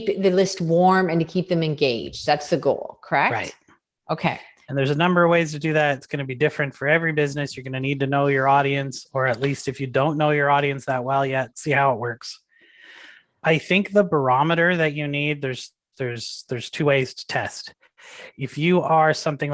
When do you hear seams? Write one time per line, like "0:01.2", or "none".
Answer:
0:11.5